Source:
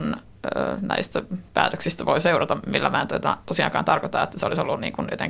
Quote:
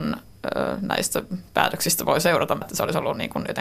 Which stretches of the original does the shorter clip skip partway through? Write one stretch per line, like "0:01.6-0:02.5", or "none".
0:02.6-0:04.2